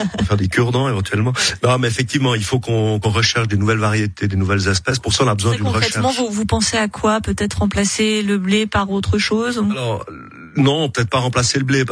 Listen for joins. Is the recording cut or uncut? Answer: uncut